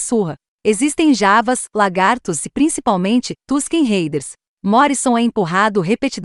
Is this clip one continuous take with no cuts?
yes; 0 cuts

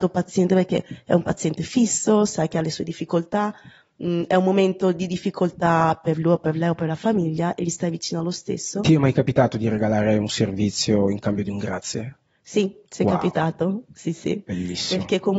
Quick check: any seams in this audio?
no; 0 cuts

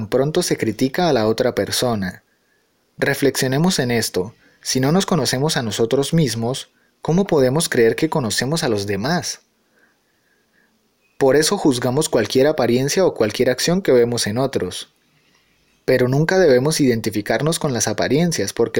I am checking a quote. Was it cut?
no; 0 cuts

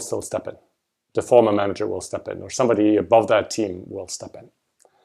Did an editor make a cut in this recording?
no; 0 cuts

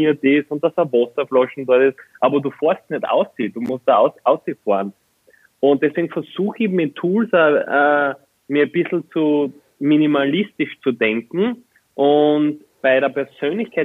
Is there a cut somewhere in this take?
no; 0 cuts

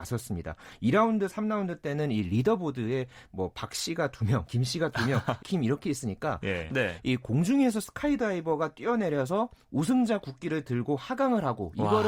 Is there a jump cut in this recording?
yes; 2 cuts; at 5.4 s, 6.7 s

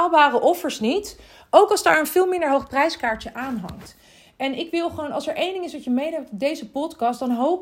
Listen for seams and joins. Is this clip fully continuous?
yes; 0 cuts

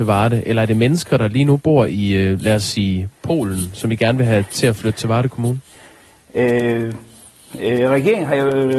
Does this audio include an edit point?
no; 0 cuts

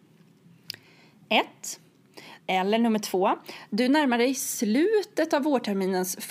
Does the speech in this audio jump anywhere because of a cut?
yes; 1 cut; at 2.4 s

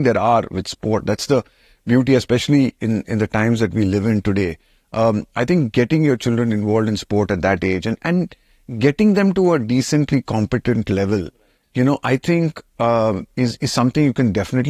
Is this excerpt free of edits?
yes; 0 cuts

